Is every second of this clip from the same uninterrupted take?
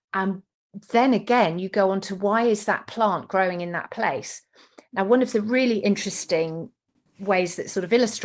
yes; 0 cuts

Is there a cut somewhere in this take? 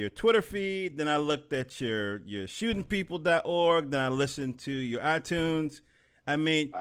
no; 0 cuts

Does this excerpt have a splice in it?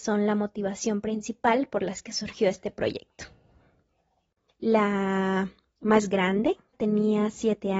yes; 2 cuts; at 4.5 s, 6.7 s

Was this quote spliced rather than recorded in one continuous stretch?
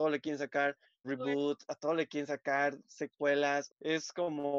yes; 2 cuts; at 1.0 s, 3.7 s

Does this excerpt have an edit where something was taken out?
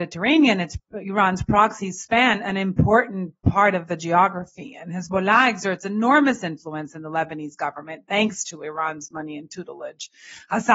no; 0 cuts

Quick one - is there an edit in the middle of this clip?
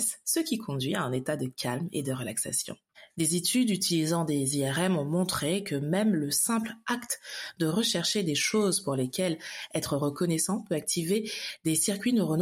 no; 0 cuts

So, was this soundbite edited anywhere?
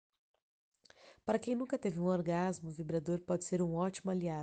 no; 0 cuts

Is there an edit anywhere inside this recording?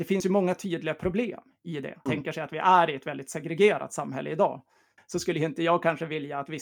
yes; 2 cuts; at 2.1 s, 5.0 s

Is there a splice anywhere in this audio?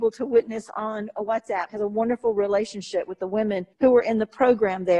yes; 2 cuts; at 1.7 s, 3.7 s

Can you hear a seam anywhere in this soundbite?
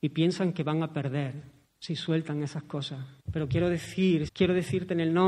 yes; 2 cuts; at 3.2 s, 4.3 s

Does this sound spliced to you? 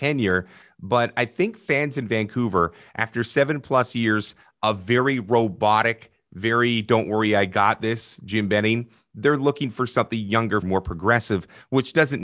yes; 1 cut; at 10.6 s

